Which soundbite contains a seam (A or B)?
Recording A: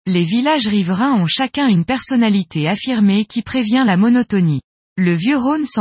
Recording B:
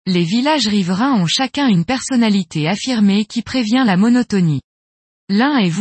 A